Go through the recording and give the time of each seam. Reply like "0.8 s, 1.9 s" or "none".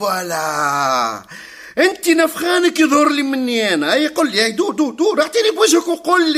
none